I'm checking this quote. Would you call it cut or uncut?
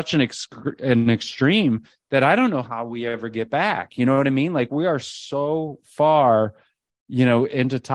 uncut